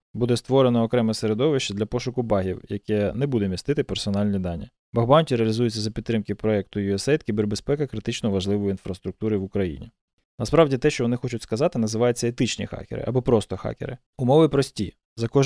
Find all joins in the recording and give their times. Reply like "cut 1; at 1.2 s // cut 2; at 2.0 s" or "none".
cut 1; at 10.2 s // cut 2; at 14.1 s